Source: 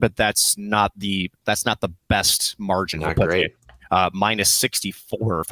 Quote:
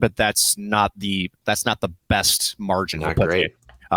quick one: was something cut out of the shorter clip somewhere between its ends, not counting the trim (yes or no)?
no